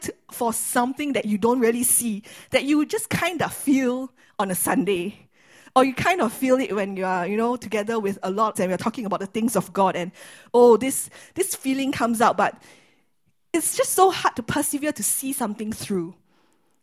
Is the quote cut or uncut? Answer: cut